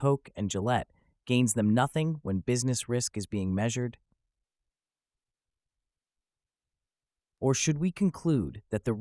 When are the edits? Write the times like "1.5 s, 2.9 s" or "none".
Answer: none